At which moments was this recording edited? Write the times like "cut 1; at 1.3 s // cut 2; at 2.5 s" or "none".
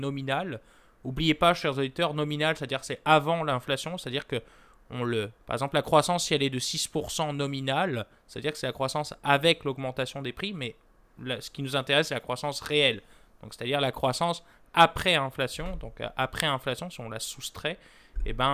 none